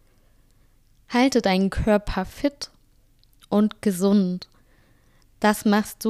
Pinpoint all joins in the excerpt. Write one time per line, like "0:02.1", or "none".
none